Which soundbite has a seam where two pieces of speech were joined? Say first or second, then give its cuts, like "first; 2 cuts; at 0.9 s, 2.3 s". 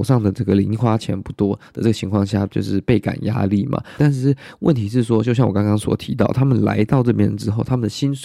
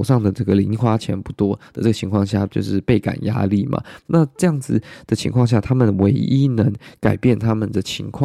first; 1 cut; at 4.0 s